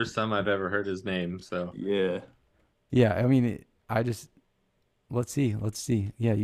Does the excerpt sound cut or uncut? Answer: uncut